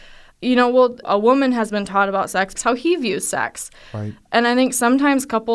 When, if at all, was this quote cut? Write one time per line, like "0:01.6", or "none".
0:01.0
0:02.5